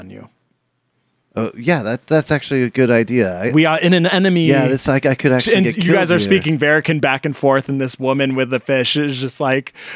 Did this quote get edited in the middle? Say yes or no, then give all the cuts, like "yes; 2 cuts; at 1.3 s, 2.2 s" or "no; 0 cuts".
no; 0 cuts